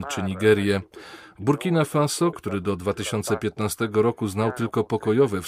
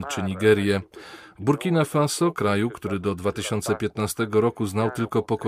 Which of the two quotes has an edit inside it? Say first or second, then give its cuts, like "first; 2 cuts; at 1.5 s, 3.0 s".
first; 1 cut; at 2.3 s